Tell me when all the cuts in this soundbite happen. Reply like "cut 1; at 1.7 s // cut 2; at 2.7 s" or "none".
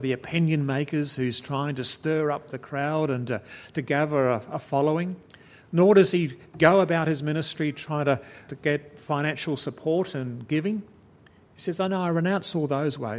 cut 1; at 8.5 s